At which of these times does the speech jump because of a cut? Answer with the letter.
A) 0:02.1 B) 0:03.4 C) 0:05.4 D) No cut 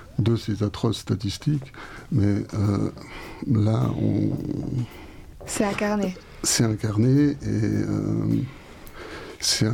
D